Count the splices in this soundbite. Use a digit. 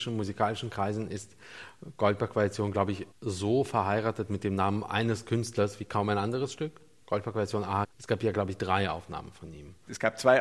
2